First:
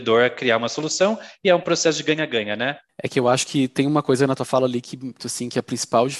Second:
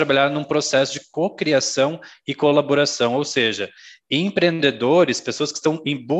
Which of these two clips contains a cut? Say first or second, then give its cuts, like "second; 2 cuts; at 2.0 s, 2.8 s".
first; 2 cuts; at 2.9 s, 5.2 s